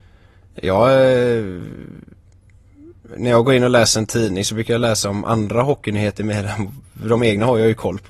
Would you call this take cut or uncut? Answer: uncut